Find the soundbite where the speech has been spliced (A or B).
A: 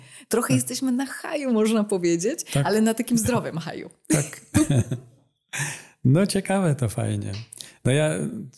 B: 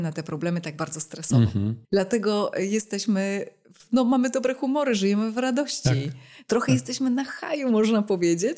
B